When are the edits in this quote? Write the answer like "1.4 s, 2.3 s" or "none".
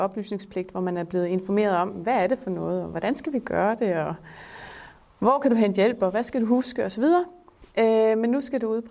none